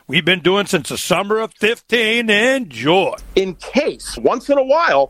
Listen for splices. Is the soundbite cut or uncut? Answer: cut